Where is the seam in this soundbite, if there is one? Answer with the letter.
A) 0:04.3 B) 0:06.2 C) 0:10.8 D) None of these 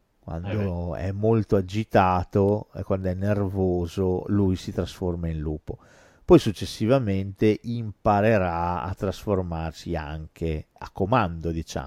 C